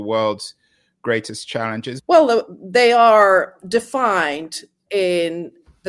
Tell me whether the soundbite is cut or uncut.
cut